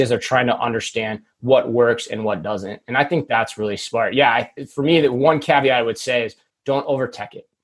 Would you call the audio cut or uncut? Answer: uncut